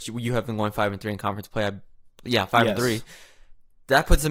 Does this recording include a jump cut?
no; 0 cuts

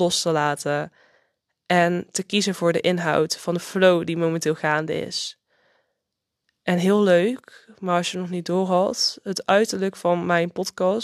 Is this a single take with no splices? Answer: yes; 0 cuts

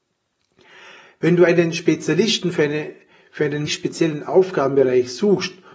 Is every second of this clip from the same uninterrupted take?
no; 1 cut; at 3.7 s

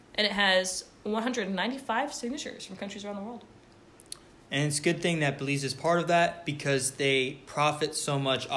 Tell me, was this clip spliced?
no; 0 cuts

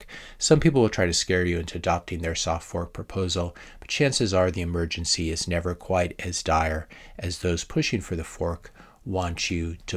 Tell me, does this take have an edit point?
no; 0 cuts

